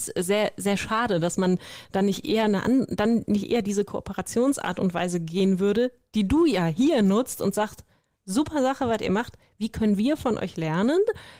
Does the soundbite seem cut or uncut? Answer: uncut